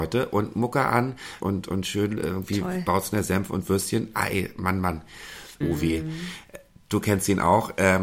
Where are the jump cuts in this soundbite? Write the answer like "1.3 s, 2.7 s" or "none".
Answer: 1.4 s, 5.6 s